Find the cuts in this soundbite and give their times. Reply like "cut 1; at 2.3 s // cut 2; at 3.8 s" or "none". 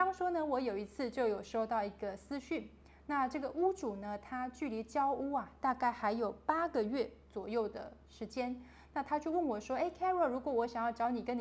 none